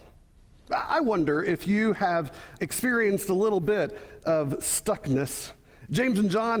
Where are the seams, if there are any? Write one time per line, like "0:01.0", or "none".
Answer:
0:02.6